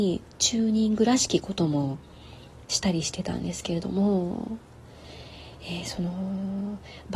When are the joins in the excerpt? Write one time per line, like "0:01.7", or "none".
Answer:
none